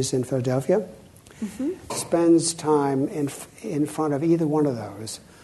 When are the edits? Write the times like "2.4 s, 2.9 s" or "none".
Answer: 1.9 s